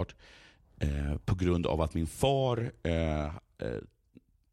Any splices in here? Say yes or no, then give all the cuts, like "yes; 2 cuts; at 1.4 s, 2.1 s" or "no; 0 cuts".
no; 0 cuts